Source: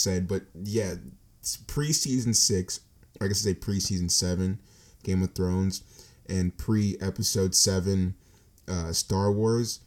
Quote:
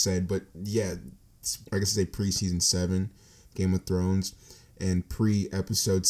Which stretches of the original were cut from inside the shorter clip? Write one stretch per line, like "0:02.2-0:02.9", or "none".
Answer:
0:01.6-0:03.1